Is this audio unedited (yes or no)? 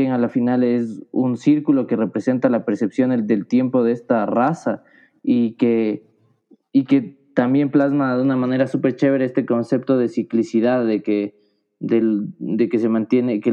yes